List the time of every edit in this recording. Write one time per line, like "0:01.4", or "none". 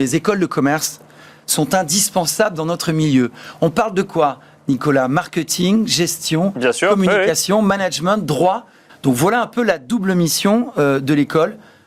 0:08.9

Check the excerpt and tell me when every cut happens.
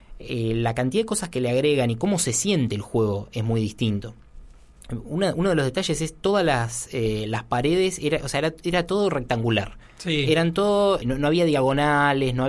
0:11.0

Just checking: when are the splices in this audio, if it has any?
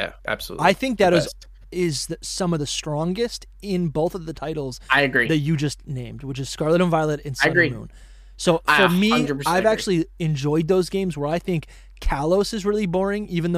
none

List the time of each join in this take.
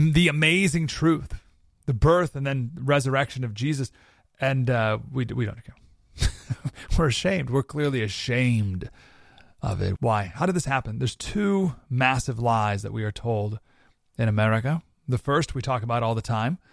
0:10.0

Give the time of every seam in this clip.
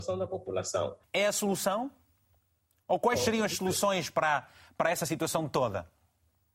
0:01.0

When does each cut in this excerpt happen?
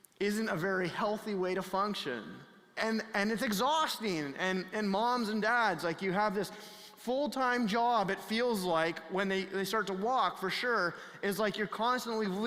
0:02.8

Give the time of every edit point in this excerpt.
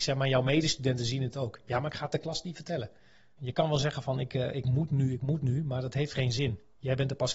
0:03.4

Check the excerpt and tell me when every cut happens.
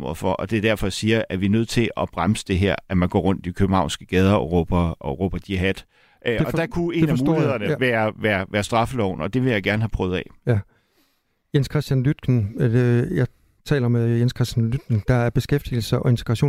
none

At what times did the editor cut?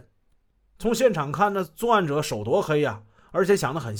none

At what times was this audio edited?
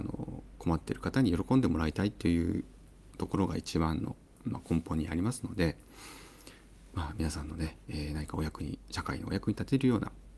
none

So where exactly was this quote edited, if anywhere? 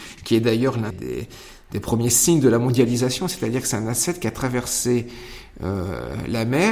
0:00.9

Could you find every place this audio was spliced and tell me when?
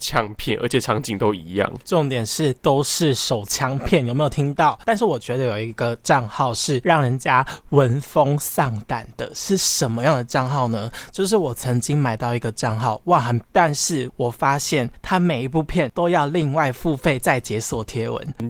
0:13.4

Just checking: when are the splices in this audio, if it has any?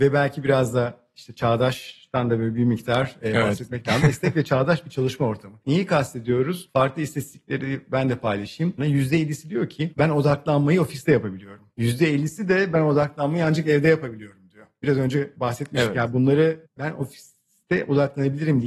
0:08.8

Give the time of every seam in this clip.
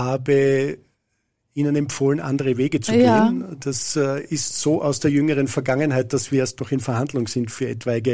none

